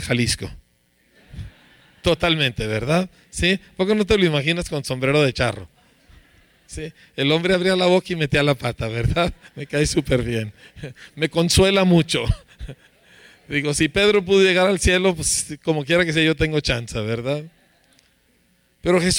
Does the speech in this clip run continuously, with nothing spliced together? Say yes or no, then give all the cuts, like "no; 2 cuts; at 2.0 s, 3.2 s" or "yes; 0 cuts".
yes; 0 cuts